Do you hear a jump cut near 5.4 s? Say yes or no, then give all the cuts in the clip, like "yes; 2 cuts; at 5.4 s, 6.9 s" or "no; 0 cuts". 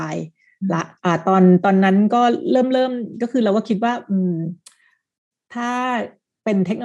no; 1 cut; at 1.0 s